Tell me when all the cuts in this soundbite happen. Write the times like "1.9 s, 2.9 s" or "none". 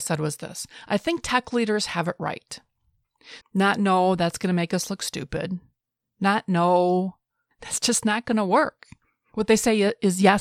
3.4 s